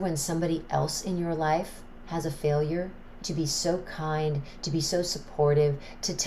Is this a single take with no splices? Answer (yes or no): no